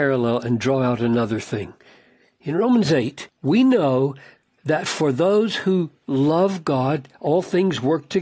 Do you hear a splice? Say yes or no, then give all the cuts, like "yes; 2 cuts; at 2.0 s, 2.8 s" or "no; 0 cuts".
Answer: yes; 1 cut; at 3.3 s